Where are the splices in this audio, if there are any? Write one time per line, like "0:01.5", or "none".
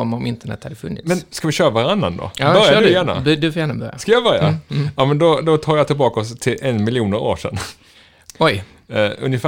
none